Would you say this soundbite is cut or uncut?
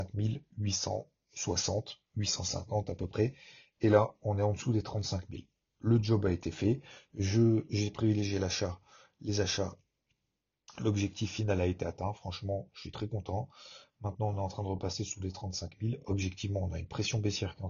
uncut